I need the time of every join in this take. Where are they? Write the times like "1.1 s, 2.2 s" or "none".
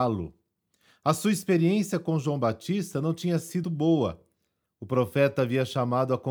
3.6 s